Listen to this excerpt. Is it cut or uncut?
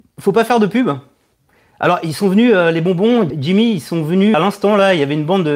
cut